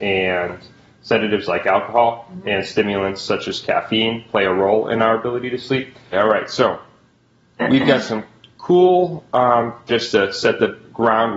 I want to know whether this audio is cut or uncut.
cut